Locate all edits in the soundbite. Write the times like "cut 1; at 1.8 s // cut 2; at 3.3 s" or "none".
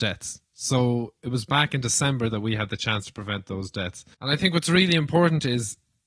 cut 1; at 4.1 s